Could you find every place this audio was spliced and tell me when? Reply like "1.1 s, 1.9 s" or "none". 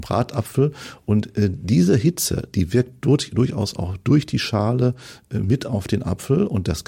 none

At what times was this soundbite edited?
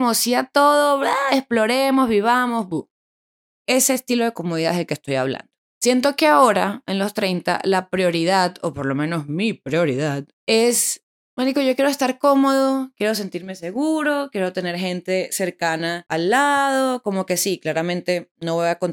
3.7 s, 5.7 s, 10.3 s

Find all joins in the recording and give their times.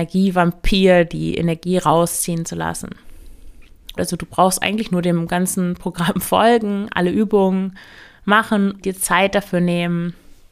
4.0 s, 8.8 s

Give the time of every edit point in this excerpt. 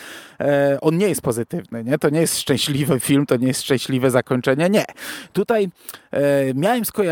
none

